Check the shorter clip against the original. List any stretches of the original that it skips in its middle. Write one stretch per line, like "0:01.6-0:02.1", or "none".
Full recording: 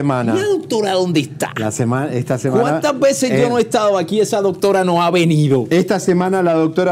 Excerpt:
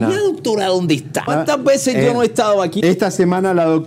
0:01.5-0:02.6
0:04.2-0:05.7

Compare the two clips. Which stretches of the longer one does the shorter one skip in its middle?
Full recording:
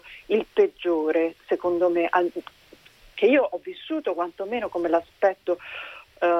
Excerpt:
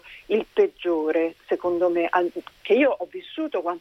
0:02.6-0:03.1

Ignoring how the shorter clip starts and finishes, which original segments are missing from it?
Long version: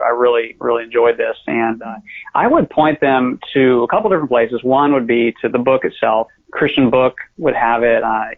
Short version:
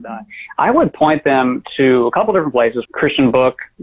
0:04.6-0:06.4

